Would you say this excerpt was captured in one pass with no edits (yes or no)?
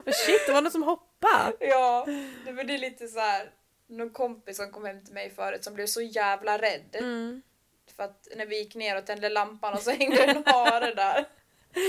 yes